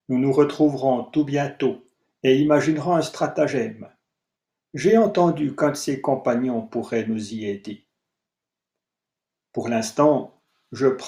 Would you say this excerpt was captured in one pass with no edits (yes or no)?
yes